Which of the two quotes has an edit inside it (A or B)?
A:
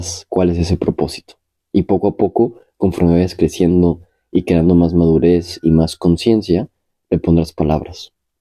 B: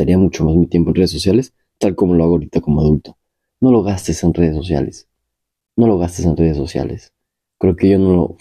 B